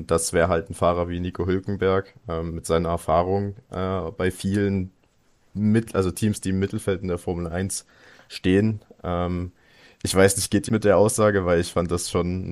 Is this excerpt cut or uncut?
cut